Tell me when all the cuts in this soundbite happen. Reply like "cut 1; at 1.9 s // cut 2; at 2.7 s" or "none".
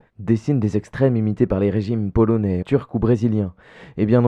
cut 1; at 2.6 s